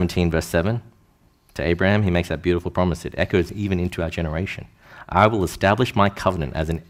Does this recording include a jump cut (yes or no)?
no